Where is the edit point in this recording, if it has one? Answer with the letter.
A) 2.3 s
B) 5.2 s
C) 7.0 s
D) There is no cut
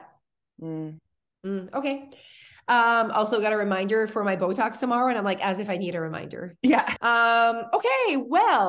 C